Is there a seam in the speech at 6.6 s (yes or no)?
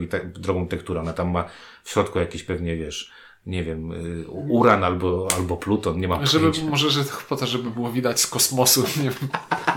no